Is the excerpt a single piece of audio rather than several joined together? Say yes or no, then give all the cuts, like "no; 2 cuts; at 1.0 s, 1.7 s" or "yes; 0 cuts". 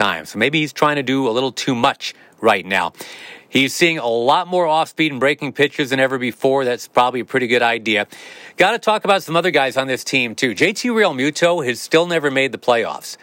yes; 0 cuts